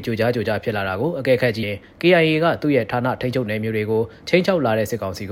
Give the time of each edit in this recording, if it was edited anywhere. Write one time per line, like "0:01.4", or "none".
0:01.6